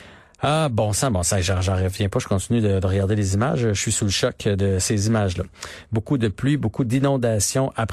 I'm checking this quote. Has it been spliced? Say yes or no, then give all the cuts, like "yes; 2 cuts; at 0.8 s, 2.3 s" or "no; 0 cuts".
yes; 1 cut; at 5.8 s